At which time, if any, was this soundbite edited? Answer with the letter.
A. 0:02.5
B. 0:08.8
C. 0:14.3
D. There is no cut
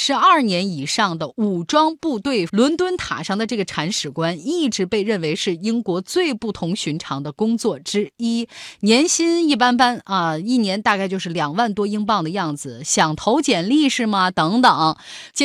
A